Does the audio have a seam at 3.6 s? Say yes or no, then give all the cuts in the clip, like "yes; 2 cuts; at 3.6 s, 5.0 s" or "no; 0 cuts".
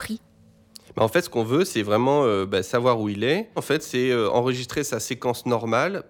yes; 1 cut; at 3.6 s